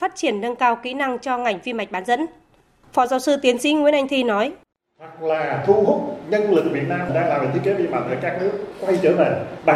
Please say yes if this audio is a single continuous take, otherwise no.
yes